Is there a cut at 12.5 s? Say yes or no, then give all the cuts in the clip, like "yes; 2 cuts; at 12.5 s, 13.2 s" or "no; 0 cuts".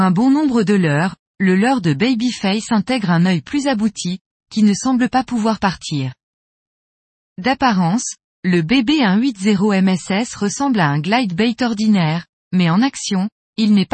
no; 1 cut; at 1.2 s